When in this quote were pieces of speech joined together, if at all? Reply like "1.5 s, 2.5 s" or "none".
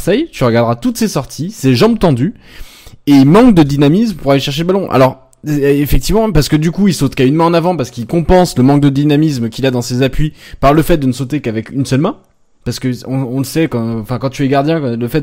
none